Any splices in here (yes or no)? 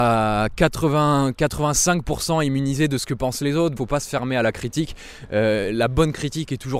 yes